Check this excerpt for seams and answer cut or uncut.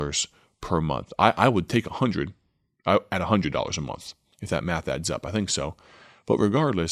uncut